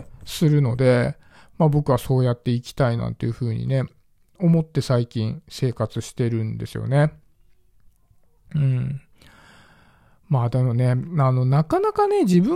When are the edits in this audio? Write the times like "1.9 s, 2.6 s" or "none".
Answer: 3.0 s